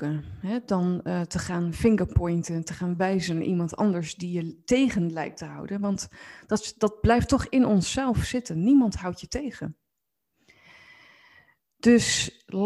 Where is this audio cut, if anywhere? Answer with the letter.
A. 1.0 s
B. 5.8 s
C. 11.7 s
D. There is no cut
D